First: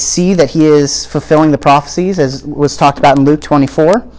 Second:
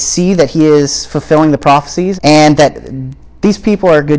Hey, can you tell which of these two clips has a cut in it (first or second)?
second